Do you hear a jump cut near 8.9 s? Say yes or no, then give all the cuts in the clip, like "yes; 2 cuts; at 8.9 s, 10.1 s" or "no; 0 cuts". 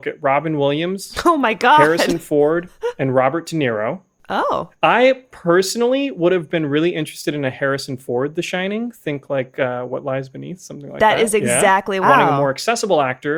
no; 1 cut; at 12.0 s